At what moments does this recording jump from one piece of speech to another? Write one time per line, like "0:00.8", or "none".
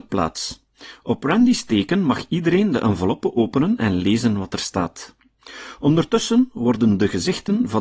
none